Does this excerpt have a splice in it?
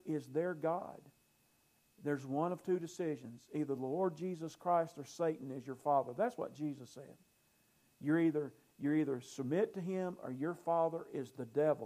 no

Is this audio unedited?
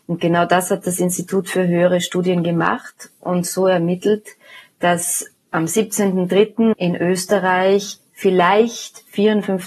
yes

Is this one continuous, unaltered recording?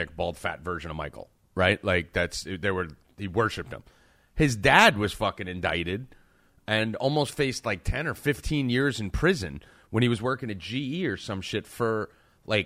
yes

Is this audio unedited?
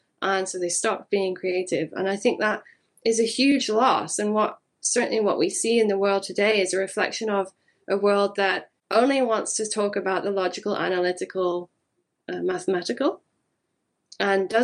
yes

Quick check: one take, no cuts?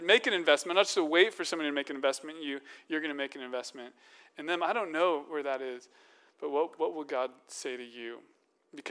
yes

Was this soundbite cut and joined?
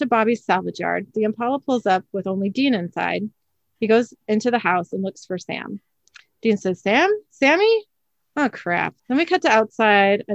yes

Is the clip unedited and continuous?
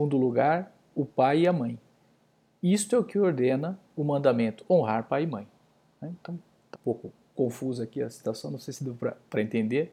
no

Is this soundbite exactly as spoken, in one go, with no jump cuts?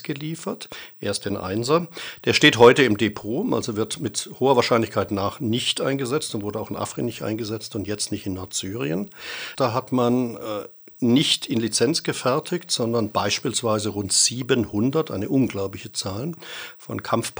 no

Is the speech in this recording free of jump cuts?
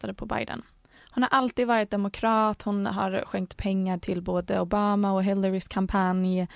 yes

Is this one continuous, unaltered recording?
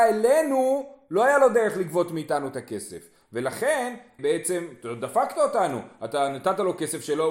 no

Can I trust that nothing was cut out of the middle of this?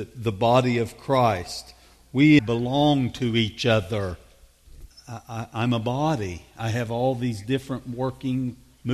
no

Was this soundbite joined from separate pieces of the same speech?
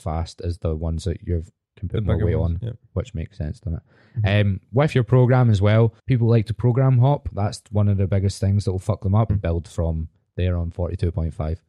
yes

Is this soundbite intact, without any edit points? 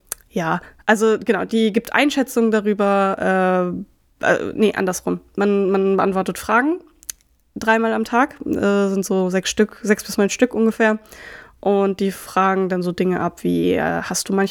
yes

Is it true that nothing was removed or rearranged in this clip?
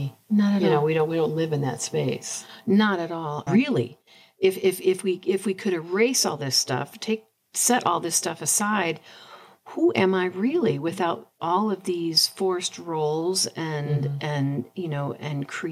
no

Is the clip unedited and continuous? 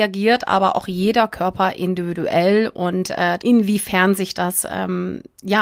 no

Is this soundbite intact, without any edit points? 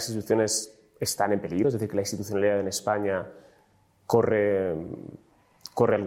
yes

